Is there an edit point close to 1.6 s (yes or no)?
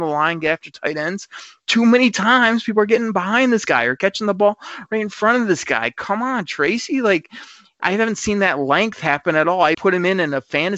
no